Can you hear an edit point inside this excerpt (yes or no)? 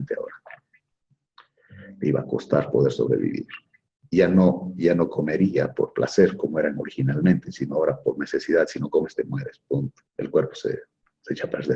yes